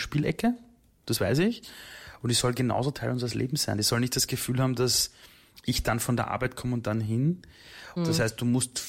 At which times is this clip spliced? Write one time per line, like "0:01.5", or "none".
0:08.0